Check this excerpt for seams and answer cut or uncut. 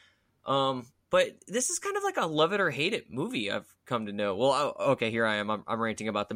uncut